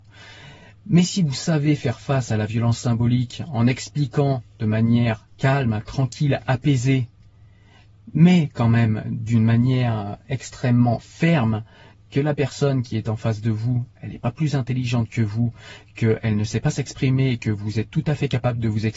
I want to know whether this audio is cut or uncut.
uncut